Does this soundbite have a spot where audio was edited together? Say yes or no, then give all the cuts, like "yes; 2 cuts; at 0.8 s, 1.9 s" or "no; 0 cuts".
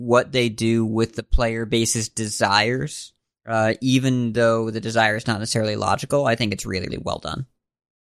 yes; 1 cut; at 6.9 s